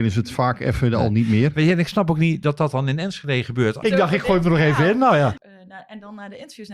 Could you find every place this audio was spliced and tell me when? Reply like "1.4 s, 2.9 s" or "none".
3.8 s, 5.4 s